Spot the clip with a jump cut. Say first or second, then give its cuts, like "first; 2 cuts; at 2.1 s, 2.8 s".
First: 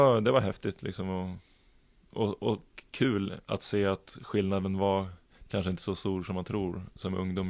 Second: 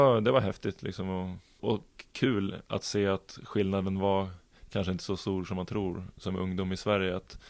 second; 1 cut; at 1.6 s